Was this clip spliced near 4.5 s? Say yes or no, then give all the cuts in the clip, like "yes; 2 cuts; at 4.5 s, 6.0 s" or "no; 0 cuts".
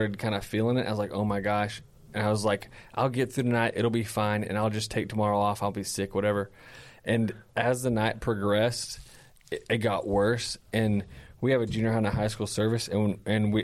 no; 0 cuts